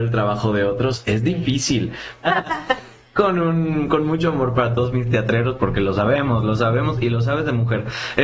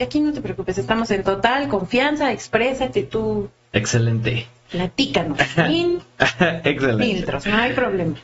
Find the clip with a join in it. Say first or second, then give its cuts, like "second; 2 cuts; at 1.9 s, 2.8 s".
first; 1 cut; at 2.2 s